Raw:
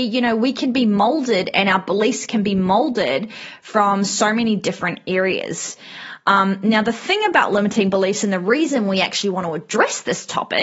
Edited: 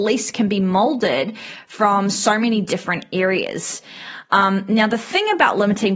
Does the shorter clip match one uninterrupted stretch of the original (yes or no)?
yes